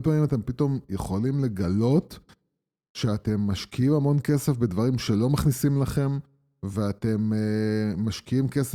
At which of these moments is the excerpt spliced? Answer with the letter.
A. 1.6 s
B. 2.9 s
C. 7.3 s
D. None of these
D